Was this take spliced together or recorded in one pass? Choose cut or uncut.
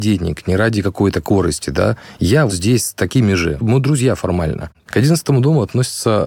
cut